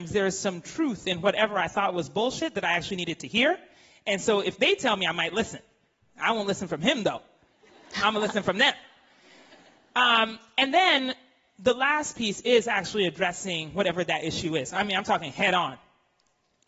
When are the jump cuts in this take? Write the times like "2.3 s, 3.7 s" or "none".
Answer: none

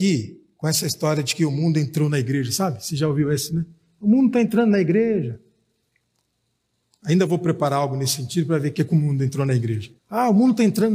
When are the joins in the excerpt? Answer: 10.0 s

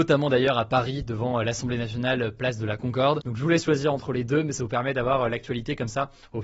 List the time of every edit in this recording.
3.2 s

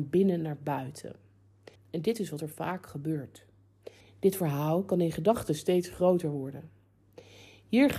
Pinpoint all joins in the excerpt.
1.8 s, 4.0 s

